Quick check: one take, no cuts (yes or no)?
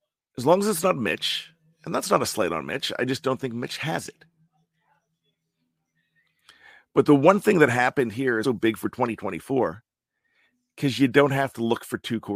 no